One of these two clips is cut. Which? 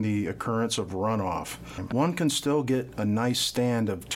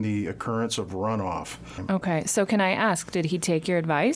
first; 1 cut; at 1.9 s

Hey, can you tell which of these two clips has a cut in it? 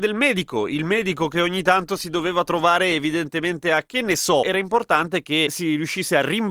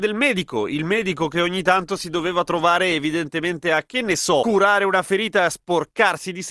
first; 1 cut; at 4.4 s

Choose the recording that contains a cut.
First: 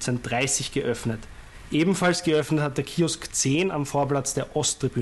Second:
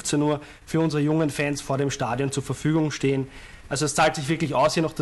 second; 1 cut; at 3.7 s

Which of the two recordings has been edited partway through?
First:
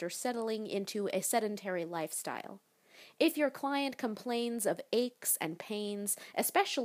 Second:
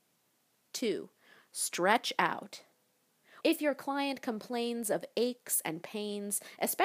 second; 1 cut; at 3.4 s

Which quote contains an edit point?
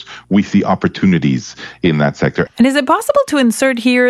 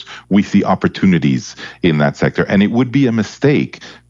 first; 1 cut; at 2.5 s

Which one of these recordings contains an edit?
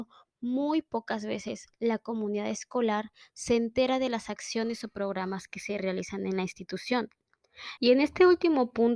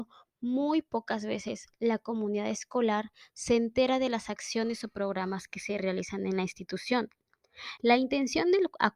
first; 1 cut; at 7.8 s

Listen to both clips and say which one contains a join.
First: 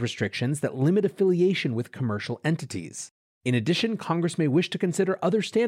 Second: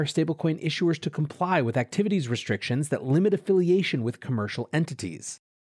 first; 1 cut; at 3.3 s

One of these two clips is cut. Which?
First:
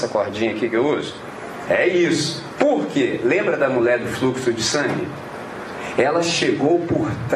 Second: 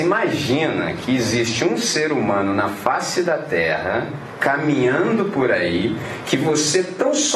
first; 1 cut; at 1.7 s

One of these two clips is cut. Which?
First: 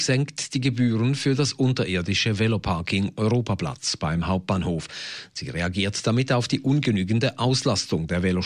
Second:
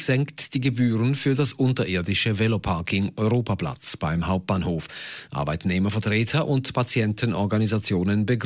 second; 1 cut; at 5.3 s

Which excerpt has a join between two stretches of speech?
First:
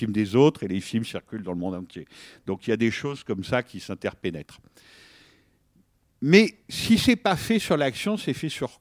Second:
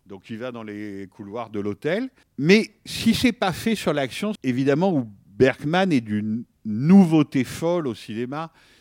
second; 2 cuts; at 2.2 s, 4.4 s

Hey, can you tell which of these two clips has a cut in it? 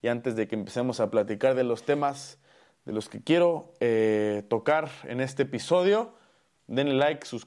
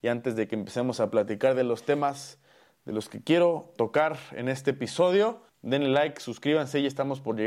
second; 2 cuts; at 3.8 s, 5.5 s

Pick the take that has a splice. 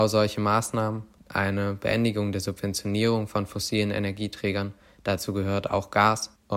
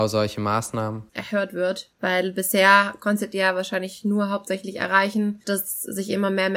second; 1 cut; at 1.1 s

